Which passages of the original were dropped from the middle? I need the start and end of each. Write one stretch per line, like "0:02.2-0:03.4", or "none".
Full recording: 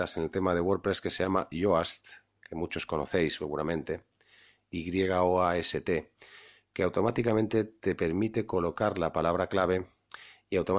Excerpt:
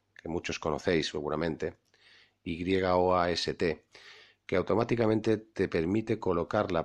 none